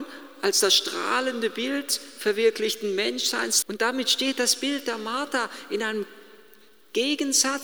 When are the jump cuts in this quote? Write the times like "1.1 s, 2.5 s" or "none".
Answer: 3.6 s